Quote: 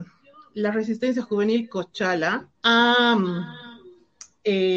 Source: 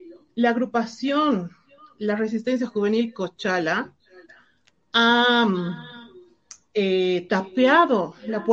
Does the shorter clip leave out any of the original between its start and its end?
yes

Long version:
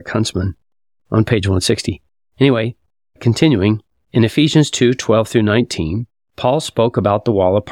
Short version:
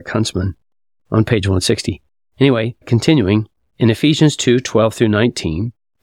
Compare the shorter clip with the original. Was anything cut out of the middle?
yes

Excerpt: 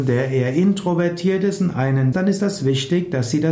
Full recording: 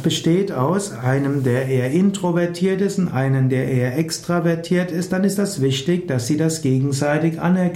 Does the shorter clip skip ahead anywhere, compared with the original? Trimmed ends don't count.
yes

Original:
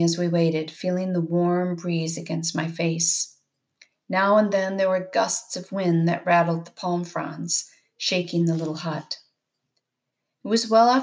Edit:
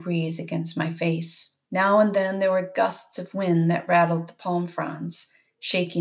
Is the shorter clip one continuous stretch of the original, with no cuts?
no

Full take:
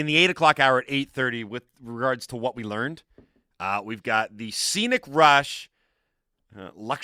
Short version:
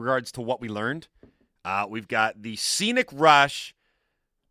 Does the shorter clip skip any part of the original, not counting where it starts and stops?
no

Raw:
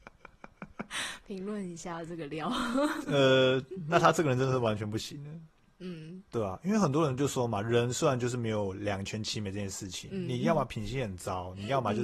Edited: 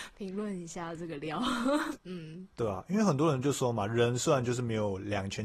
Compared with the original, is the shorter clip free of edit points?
no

